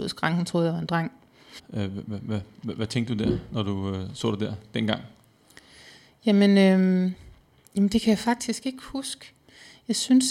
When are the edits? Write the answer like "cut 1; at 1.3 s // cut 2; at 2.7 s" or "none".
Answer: cut 1; at 1.6 s